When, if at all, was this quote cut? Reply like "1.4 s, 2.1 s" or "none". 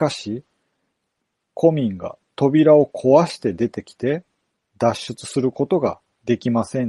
4.6 s